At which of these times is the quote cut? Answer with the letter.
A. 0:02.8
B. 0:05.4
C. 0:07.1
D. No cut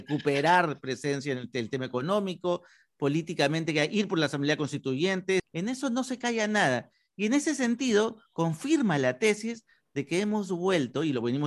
B